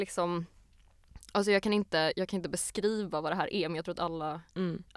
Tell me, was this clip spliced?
no; 0 cuts

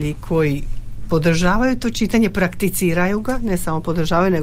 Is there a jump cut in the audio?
no; 0 cuts

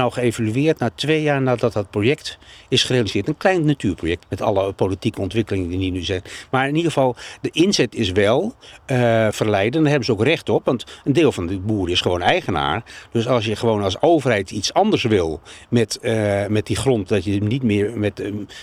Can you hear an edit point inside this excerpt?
yes; 2 cuts; at 4.2 s, 9.3 s

